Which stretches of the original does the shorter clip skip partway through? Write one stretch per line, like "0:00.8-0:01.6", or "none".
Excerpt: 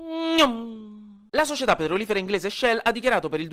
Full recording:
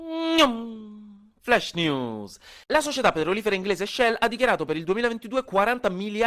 0:01.3-0:02.7